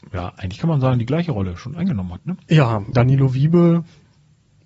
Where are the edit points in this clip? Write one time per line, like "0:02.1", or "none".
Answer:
0:02.9